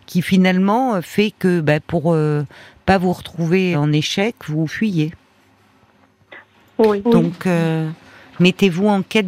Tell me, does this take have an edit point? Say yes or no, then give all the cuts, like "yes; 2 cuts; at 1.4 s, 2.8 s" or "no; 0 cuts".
yes; 2 cuts; at 3.7 s, 7.0 s